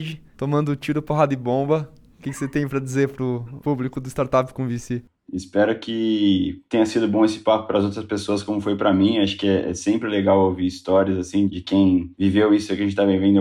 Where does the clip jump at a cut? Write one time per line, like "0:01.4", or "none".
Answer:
0:05.2